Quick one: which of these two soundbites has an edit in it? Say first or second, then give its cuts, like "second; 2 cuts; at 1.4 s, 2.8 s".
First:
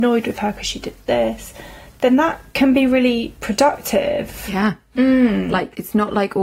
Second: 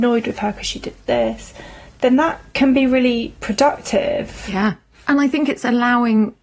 first; 1 cut; at 5.0 s